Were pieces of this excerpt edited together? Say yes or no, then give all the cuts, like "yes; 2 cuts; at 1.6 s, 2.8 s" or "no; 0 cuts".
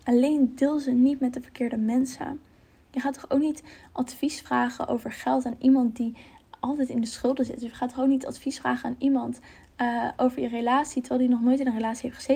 no; 0 cuts